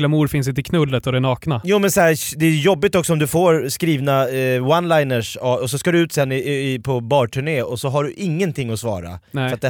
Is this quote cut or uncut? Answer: uncut